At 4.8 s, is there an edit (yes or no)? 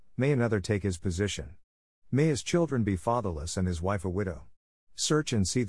yes